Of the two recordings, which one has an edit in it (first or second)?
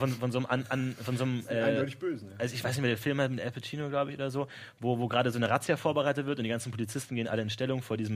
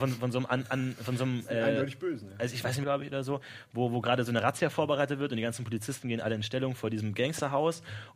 second